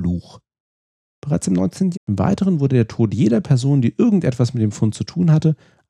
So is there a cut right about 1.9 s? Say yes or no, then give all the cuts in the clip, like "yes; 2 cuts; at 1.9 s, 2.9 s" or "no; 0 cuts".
yes; 1 cut; at 1.9 s